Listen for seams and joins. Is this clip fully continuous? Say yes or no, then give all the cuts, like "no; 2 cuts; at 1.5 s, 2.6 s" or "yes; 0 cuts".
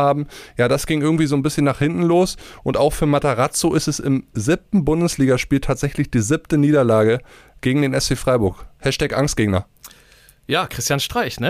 yes; 0 cuts